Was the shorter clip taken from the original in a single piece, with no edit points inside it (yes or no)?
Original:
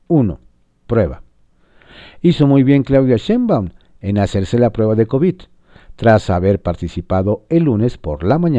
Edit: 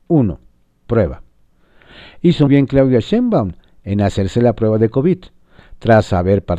no